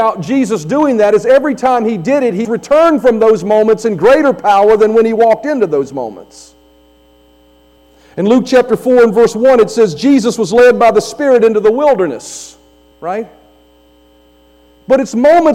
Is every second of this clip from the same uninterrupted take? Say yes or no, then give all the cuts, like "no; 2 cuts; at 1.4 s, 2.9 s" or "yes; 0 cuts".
no; 2 cuts; at 2.4 s, 12.9 s